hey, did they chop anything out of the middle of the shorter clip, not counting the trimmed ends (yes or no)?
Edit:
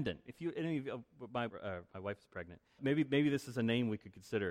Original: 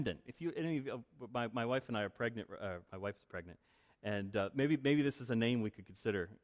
yes